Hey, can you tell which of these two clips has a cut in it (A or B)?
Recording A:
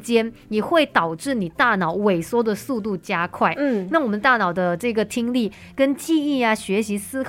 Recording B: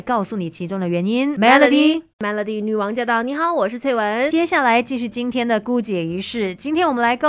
B